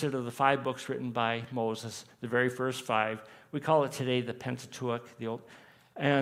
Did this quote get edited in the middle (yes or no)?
no